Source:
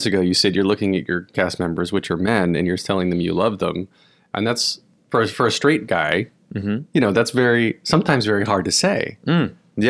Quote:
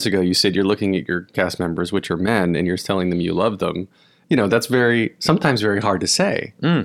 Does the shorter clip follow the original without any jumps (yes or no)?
no